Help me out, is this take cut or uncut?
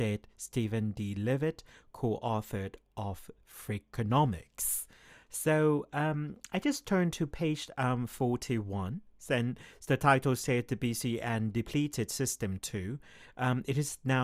uncut